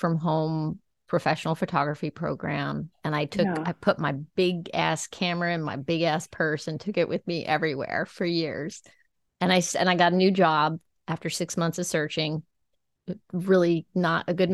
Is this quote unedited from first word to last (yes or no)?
yes